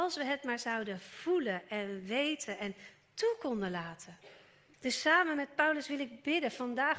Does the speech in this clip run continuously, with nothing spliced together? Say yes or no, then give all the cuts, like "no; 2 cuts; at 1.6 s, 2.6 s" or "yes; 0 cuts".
no; 1 cut; at 4.7 s